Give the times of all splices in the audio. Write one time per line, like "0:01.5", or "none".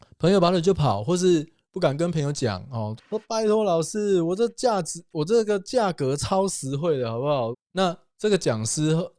0:03.0
0:07.5